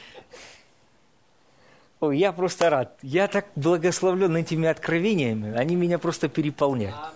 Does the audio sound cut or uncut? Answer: uncut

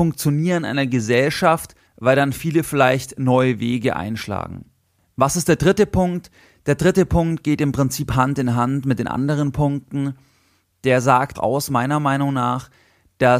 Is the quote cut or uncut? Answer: cut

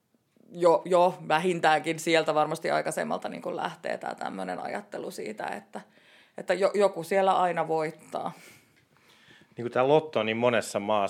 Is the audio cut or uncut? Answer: uncut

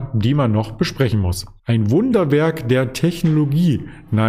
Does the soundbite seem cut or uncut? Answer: cut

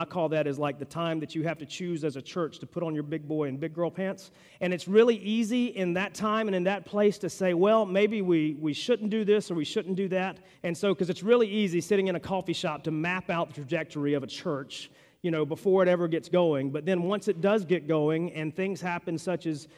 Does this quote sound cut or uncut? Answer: cut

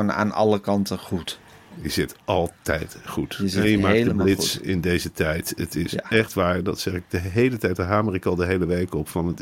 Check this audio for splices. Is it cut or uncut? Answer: uncut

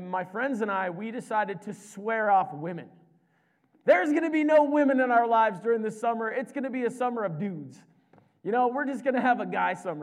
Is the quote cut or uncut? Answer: uncut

